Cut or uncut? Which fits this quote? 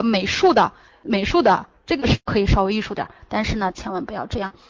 cut